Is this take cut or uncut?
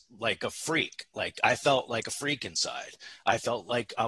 uncut